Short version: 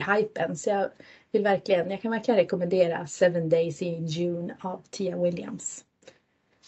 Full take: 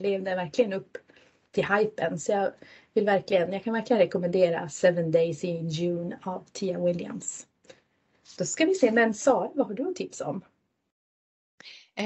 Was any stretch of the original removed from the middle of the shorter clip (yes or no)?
no